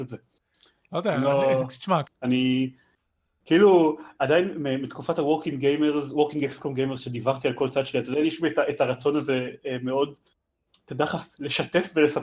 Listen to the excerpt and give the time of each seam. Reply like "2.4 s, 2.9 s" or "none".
2.0 s